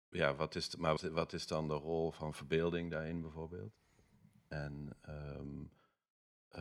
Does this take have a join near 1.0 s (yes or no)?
yes